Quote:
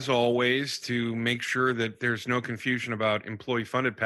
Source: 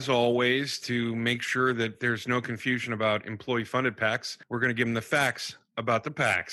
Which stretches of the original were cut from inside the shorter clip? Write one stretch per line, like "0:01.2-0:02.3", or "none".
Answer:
none